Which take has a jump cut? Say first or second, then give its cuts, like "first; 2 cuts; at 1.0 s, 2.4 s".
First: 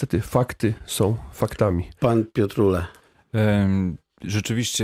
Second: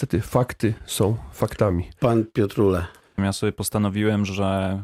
second; 1 cut; at 3.2 s